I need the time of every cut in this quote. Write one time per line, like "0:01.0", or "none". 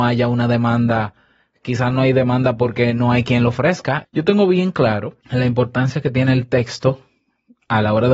0:04.0
0:05.2